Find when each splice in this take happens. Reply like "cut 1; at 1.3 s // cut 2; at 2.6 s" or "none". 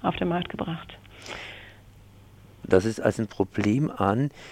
cut 1; at 3.0 s